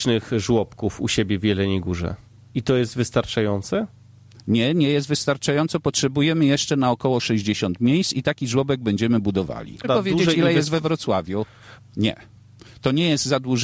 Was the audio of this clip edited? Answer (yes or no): yes